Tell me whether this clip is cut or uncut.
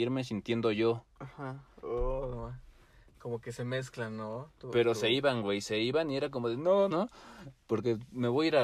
cut